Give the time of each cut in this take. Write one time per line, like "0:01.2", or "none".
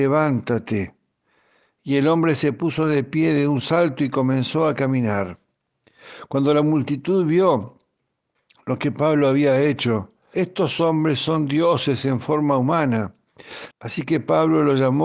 0:10.3
0:13.7

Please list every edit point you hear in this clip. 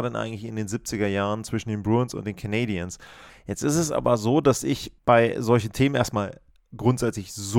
0:03.3
0:05.0

